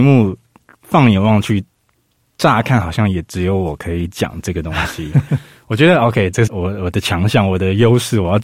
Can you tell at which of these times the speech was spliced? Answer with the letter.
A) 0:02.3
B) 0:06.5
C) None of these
B